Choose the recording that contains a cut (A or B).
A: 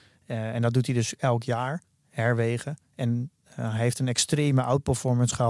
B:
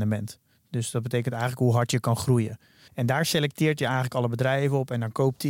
B